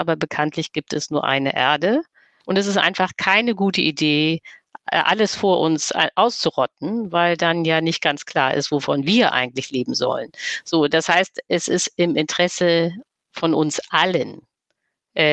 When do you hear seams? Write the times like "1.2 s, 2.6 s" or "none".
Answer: 2.4 s